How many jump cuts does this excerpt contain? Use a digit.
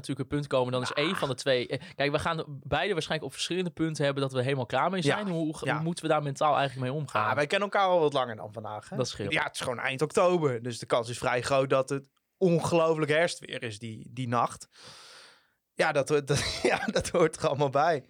1